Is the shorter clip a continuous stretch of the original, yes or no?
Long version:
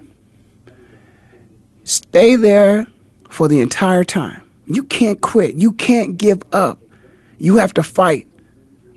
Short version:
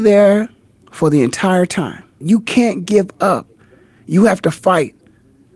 no